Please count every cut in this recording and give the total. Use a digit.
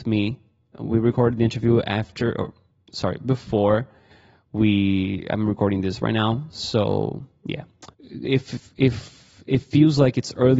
1